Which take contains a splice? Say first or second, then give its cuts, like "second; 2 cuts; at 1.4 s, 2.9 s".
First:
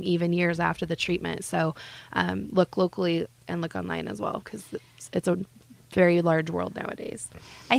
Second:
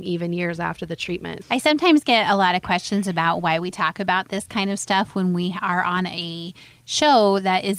second; 1 cut; at 1.4 s